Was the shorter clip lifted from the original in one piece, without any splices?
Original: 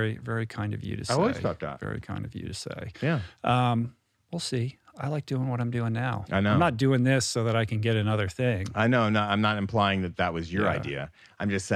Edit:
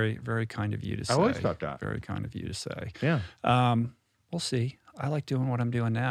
yes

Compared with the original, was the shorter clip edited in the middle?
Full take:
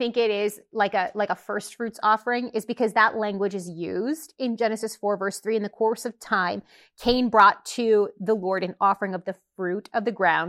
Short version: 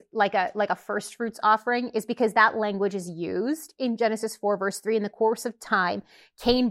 no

